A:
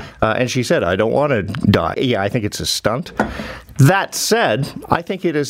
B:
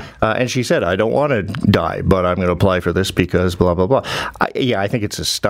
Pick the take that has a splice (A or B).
A